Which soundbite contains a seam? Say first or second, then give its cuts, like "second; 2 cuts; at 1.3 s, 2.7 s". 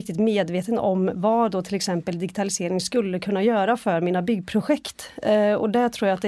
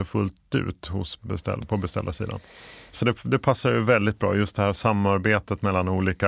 second; 1 cut; at 2.9 s